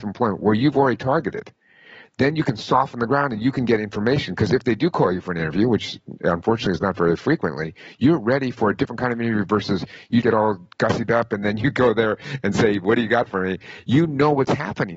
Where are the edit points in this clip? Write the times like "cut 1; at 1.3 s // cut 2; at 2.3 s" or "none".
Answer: cut 1; at 10.2 s